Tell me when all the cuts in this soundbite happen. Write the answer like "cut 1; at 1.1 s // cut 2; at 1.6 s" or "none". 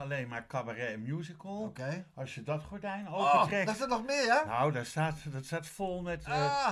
none